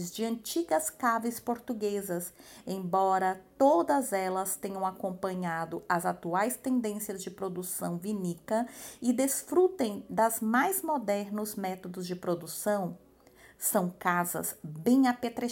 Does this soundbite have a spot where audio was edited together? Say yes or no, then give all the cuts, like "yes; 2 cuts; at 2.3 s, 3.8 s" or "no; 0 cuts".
no; 0 cuts